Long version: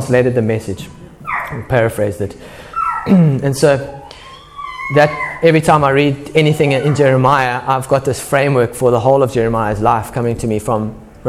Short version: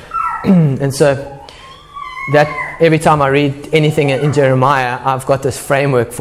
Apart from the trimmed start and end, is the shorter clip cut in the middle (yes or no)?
no